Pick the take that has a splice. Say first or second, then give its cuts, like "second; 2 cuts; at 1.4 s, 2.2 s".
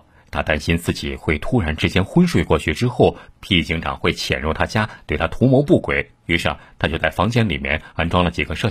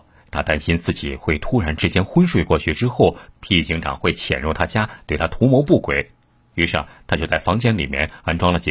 first; 1 cut; at 6.2 s